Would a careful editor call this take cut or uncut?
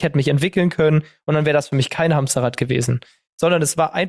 uncut